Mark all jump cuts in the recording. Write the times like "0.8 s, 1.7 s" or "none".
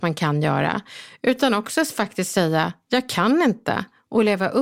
none